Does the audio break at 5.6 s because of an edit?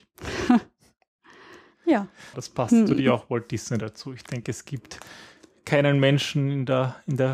no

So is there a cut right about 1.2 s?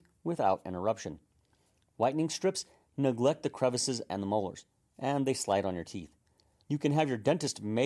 no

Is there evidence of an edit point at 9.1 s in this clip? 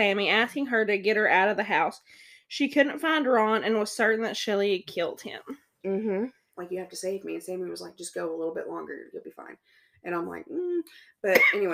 no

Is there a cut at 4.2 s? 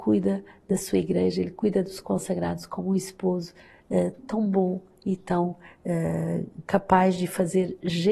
yes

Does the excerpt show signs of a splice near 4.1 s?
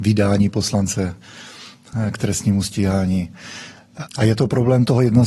yes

